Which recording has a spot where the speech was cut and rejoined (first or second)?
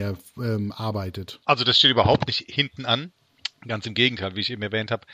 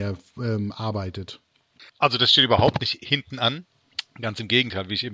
first